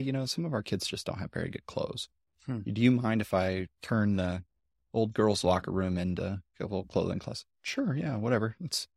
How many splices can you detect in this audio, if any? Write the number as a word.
two